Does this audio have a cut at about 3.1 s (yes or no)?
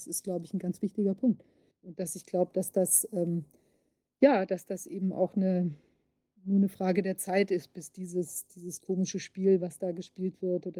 no